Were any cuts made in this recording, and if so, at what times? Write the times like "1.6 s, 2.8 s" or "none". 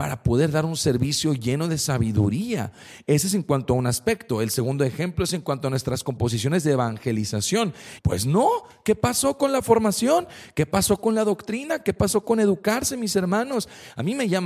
8.0 s